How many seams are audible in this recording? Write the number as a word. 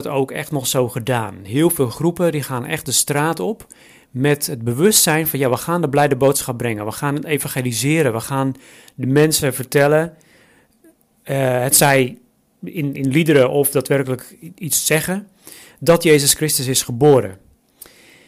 one